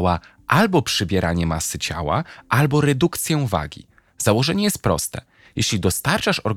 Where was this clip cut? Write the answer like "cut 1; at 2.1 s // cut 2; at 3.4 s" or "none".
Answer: none

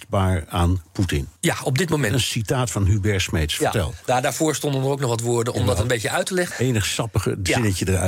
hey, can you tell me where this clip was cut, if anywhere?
cut 1; at 1.4 s // cut 2; at 6.5 s

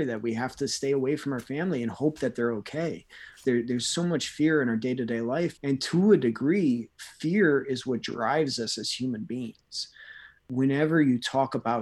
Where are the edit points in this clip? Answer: cut 1; at 3.4 s

